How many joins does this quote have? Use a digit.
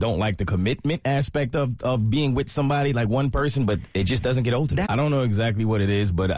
1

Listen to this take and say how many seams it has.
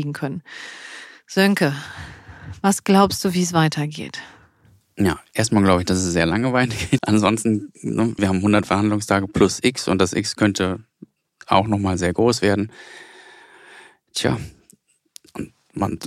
2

